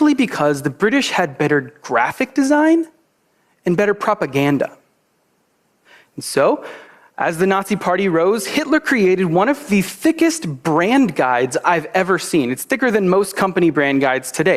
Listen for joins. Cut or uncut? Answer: uncut